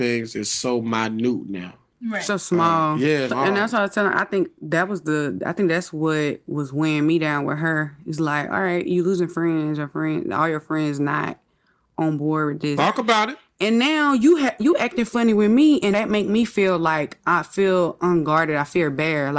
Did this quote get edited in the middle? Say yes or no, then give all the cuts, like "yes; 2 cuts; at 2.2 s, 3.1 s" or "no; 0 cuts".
yes; 3 cuts; at 3.3 s, 12.8 s, 15.9 s